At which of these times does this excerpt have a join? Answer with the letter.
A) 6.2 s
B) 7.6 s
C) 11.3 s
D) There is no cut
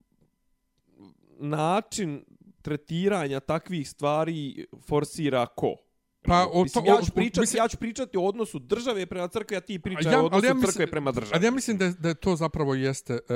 A